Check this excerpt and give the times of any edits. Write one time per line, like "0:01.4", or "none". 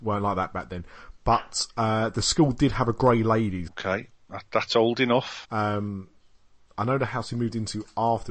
0:03.7
0:05.4